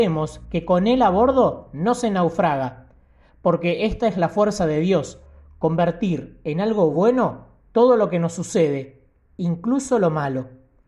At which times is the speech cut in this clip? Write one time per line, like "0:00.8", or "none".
none